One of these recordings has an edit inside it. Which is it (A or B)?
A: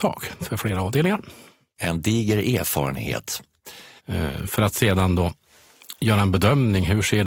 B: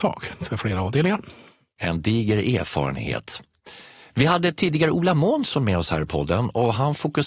A